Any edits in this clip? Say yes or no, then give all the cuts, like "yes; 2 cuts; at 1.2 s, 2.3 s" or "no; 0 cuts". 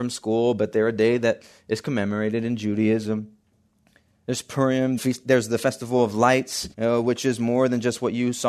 yes; 2 cuts; at 5.0 s, 6.7 s